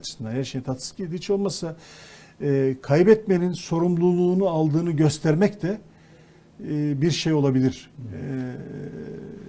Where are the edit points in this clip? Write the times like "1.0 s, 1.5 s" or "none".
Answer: none